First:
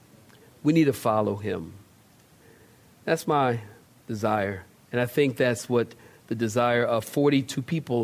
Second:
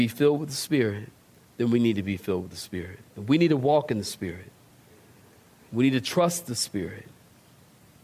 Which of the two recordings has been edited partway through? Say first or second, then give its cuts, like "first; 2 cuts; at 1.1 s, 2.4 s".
second; 1 cut; at 3.1 s